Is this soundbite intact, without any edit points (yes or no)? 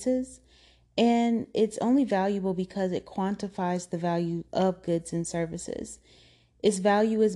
yes